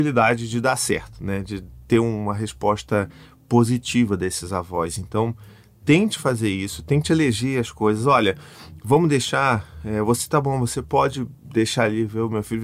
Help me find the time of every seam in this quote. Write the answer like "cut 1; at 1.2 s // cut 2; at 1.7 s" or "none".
none

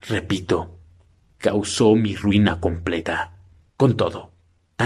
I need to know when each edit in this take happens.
cut 1; at 3.7 s

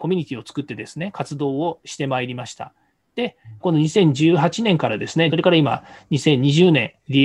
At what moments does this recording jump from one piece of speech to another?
cut 1; at 3.6 s // cut 2; at 5.3 s

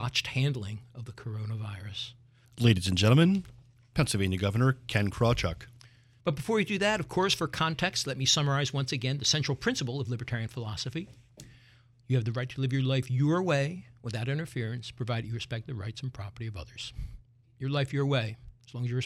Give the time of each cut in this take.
cut 1; at 2.4 s // cut 2; at 6.2 s // cut 3; at 17.4 s

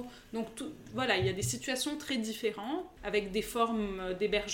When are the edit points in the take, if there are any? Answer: cut 1; at 3.0 s

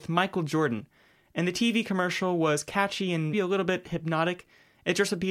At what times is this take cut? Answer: cut 1; at 3.3 s

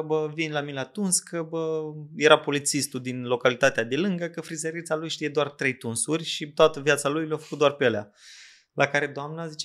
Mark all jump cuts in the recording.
none

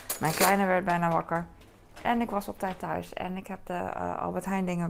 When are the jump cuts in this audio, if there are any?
none

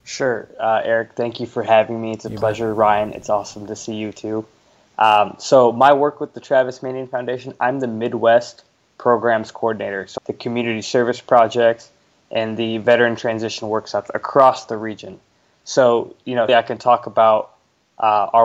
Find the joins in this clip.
cut 1; at 10.2 s // cut 2; at 16.5 s

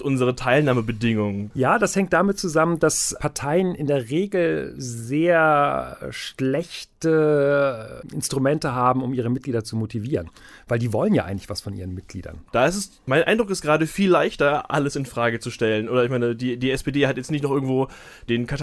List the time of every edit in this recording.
cut 1; at 1.5 s // cut 2; at 12.5 s

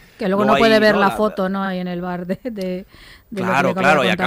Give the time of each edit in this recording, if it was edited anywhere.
none

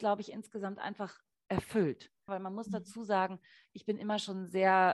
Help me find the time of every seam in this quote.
cut 1; at 2.3 s

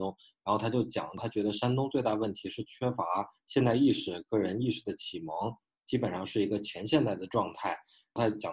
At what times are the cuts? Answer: none

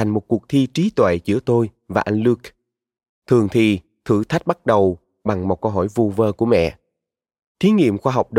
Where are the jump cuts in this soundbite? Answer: cut 1; at 7.4 s

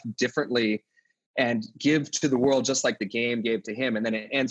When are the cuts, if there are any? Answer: none

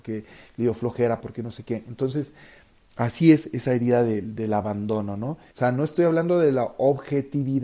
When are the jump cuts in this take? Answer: cut 1; at 1.2 s // cut 2; at 5.5 s

